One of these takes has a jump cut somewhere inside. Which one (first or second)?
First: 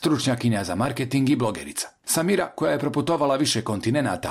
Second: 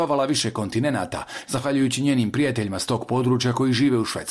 second